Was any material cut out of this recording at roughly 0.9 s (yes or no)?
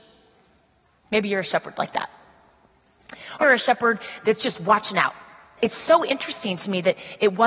no